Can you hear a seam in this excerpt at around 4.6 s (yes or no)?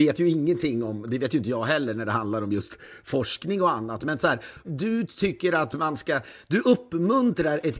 yes